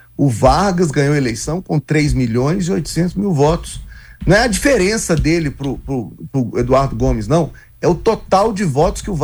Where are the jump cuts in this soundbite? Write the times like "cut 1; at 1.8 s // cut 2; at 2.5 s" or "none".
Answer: none